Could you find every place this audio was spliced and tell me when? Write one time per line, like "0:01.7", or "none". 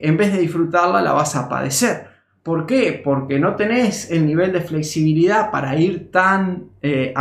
none